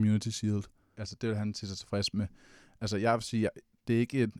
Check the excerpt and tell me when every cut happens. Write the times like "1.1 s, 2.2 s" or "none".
0.9 s